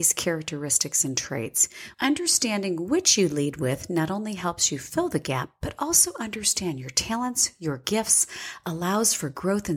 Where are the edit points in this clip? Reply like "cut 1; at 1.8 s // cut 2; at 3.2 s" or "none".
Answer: cut 1; at 1.9 s